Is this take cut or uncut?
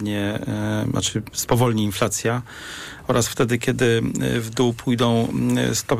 uncut